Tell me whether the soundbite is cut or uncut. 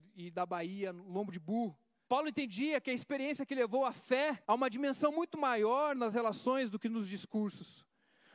cut